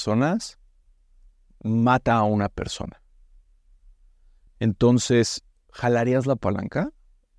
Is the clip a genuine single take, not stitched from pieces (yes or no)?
yes